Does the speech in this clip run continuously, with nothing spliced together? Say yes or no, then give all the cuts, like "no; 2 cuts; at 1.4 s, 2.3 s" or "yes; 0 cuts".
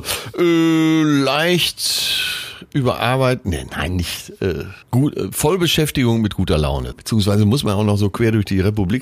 no; 2 cuts; at 4.8 s, 6.9 s